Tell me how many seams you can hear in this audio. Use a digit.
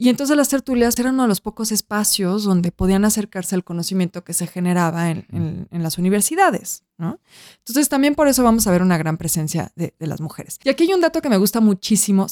1